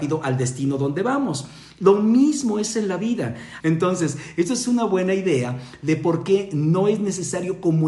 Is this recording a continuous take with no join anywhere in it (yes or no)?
no